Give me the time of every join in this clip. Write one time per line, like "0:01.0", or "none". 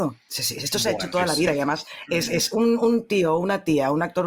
none